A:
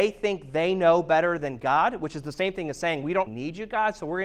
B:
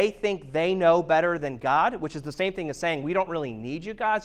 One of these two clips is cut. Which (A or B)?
A